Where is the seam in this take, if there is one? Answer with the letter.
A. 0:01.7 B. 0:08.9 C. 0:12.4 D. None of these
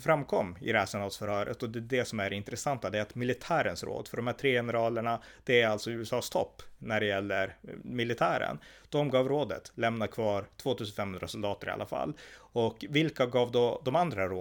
D